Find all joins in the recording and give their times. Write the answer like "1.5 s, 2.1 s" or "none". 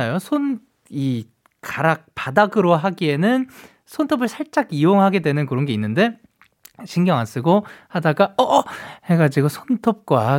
none